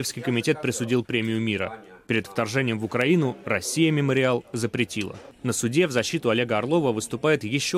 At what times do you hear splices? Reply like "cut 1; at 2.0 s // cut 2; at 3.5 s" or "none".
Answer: none